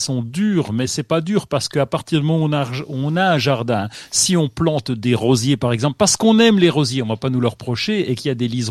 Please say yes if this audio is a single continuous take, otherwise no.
yes